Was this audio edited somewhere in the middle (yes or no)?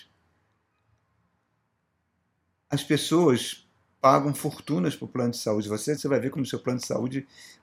yes